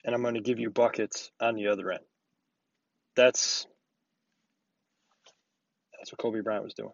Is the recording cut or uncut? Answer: cut